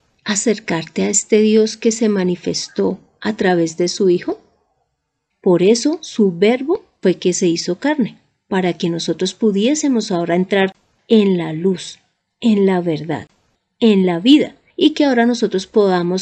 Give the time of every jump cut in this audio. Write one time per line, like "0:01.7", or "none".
0:05.3